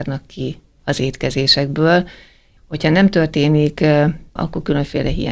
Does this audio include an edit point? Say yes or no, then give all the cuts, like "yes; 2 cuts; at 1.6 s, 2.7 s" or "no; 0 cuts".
yes; 2 cuts; at 2.6 s, 4.4 s